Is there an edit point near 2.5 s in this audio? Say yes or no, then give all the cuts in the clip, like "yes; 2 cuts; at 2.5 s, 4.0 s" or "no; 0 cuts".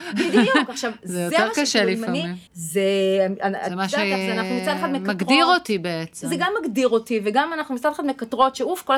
yes; 1 cut; at 2.5 s